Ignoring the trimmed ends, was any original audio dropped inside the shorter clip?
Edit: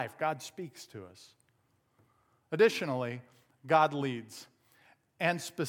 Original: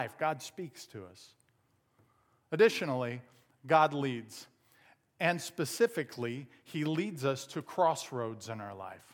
no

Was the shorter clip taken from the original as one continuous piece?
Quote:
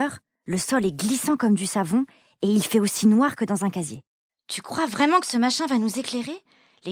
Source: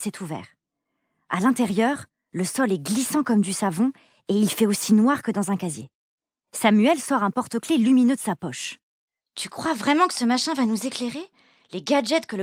no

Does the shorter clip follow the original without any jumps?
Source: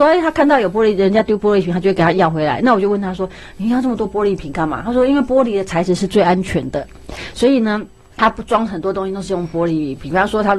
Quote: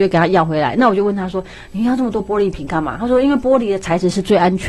yes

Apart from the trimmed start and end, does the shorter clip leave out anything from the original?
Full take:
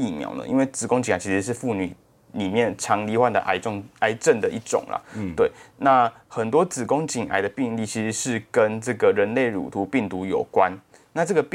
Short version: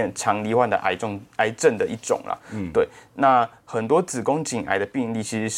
no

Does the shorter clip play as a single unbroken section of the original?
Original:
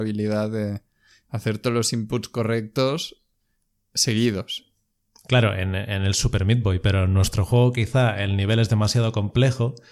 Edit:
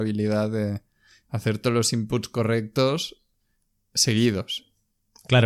yes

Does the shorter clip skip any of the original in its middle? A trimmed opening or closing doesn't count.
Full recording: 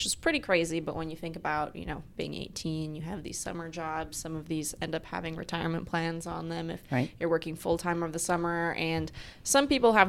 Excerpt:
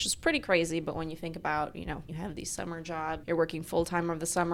yes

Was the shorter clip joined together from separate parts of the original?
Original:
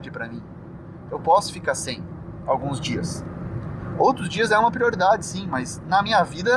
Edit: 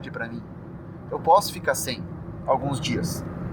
no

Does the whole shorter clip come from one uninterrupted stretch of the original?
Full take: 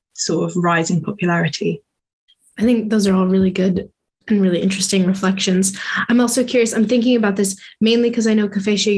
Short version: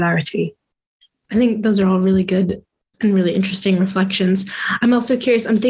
yes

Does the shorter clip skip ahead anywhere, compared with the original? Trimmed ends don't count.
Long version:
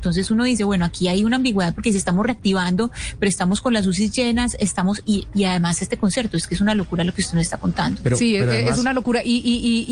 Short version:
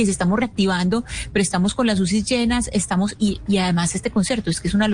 no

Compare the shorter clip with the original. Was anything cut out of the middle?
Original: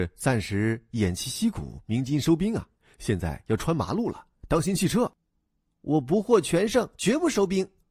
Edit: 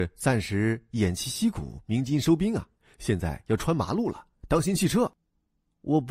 no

